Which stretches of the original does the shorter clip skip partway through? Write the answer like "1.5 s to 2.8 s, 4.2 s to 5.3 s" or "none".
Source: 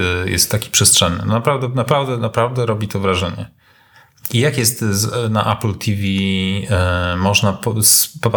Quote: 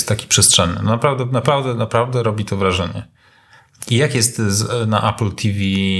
none